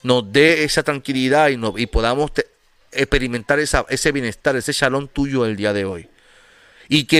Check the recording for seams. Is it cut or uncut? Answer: uncut